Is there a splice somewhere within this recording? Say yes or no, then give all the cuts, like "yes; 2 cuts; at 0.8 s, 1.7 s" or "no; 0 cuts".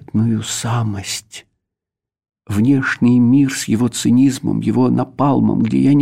no; 0 cuts